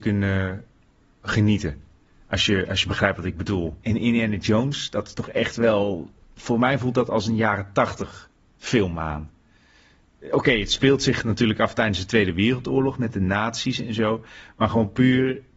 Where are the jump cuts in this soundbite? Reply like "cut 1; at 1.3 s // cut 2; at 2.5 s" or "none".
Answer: cut 1; at 3.8 s